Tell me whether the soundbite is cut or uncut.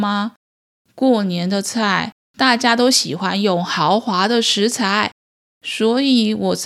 uncut